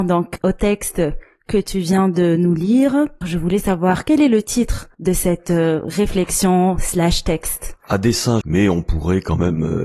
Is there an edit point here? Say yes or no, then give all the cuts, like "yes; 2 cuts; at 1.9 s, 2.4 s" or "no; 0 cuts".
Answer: yes; 2 cuts; at 3.2 s, 8.4 s